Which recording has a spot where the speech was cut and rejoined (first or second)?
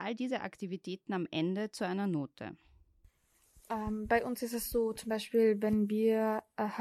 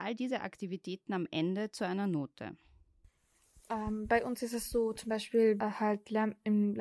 second